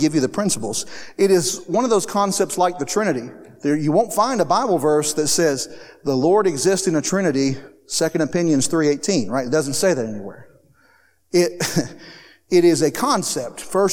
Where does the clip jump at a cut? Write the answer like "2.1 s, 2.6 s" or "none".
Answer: none